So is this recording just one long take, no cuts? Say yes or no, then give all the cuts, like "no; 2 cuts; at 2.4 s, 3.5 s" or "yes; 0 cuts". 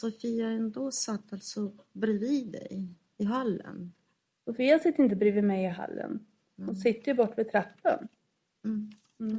yes; 0 cuts